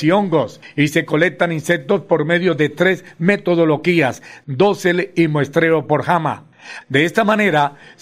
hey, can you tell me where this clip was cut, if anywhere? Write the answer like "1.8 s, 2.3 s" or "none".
4.4 s, 6.8 s

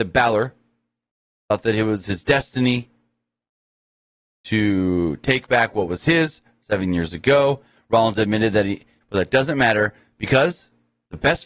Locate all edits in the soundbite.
9.0 s

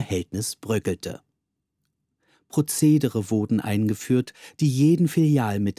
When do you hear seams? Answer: none

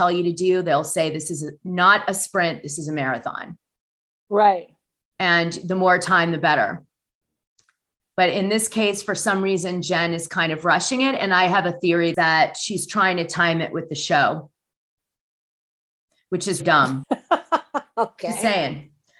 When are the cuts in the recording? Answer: 16.6 s

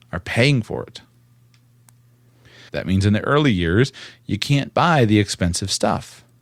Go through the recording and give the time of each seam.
2.7 s

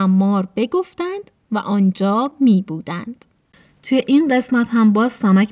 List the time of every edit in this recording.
none

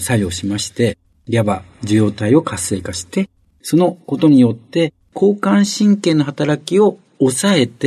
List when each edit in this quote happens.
3.5 s

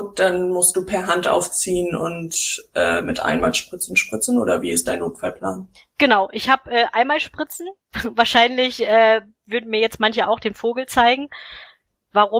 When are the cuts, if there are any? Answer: none

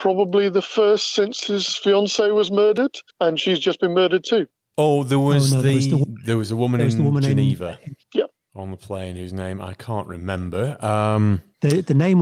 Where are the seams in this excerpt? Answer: 3.1 s, 8.0 s

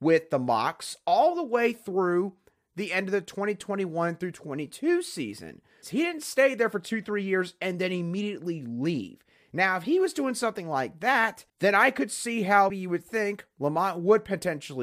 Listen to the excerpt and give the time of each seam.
5.8 s, 11.5 s, 12.7 s

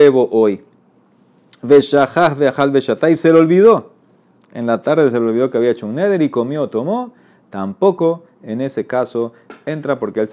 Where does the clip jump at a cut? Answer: none

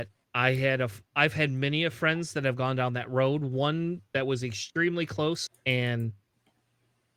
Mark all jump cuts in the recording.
5.5 s

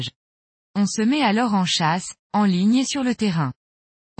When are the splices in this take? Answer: none

